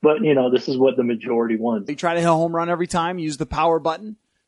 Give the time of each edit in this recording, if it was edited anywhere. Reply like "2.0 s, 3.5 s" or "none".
1.9 s